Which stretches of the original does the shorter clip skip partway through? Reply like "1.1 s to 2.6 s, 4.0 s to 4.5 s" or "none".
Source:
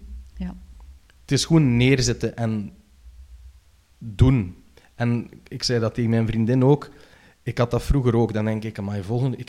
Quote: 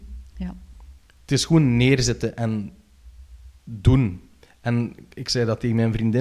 3.6 s to 3.9 s